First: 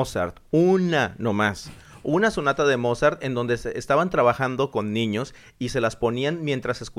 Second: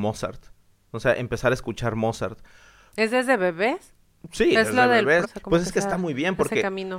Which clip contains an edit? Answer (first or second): second